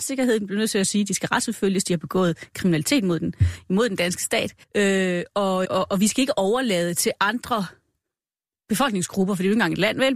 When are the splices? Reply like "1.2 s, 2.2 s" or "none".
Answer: 4.6 s, 5.6 s